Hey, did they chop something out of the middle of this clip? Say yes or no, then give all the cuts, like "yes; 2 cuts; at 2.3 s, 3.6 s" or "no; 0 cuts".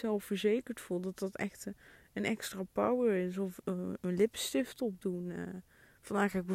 no; 0 cuts